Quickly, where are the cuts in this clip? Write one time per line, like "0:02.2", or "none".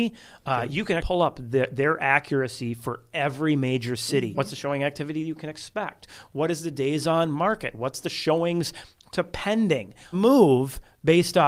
0:01.0
0:04.3
0:10.1

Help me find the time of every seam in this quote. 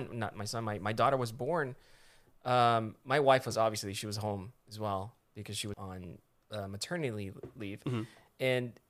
0:05.7

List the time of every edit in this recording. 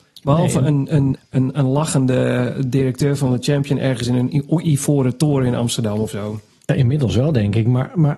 0:01.2

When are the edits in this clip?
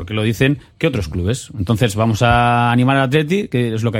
none

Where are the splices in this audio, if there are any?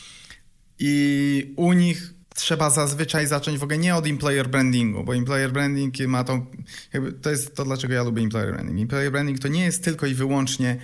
0:02.2

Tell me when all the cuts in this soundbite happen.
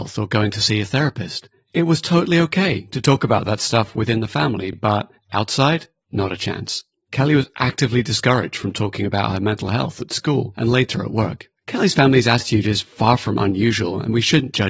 none

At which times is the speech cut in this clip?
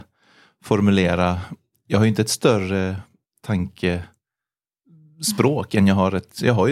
none

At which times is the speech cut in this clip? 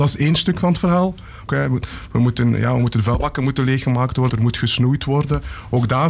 0:01.5
0:04.3

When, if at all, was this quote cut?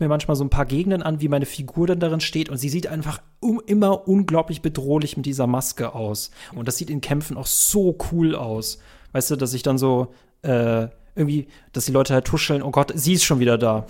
0:06.5

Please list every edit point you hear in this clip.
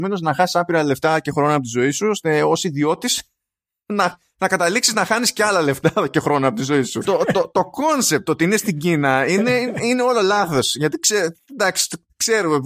0:07.1

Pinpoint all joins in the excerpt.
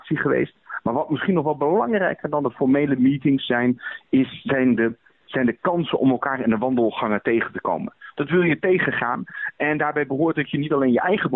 0:08.1

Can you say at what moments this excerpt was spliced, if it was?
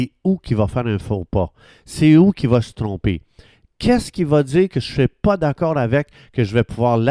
none

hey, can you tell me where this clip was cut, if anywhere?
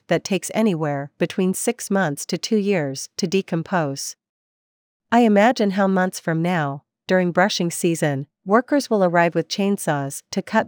none

